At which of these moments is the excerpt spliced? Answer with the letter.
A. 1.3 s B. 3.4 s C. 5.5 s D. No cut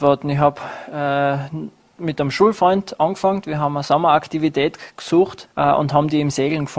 C